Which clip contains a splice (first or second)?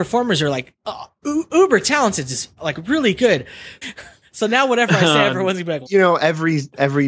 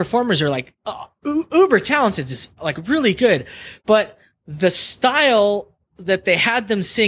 first